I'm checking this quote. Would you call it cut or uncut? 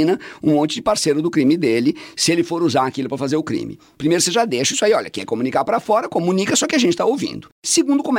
uncut